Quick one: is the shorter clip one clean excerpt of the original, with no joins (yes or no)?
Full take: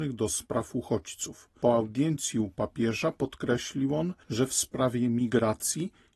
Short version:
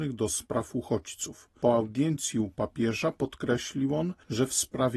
yes